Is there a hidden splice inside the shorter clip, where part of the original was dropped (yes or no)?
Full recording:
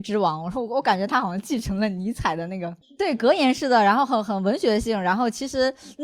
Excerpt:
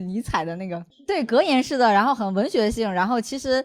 yes